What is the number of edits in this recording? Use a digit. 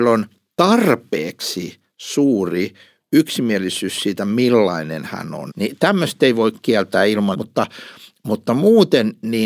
2